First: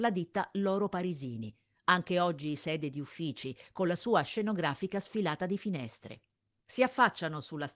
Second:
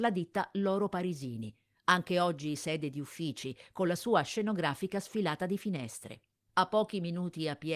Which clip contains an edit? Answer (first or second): second